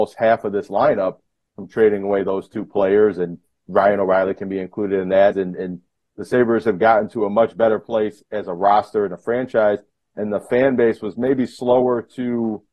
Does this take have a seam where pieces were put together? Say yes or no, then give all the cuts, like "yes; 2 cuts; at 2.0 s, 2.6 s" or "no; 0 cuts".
yes; 1 cut; at 5.3 s